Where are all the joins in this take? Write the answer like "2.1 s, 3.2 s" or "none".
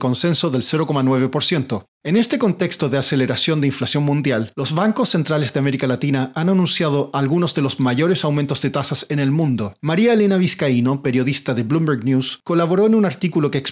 1.9 s